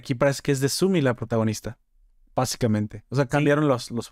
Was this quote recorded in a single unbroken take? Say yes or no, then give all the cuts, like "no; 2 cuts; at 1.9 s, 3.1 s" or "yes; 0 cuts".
yes; 0 cuts